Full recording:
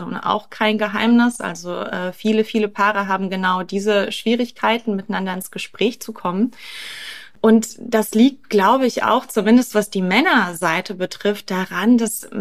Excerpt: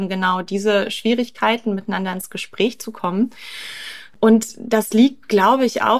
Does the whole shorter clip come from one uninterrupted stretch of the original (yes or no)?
yes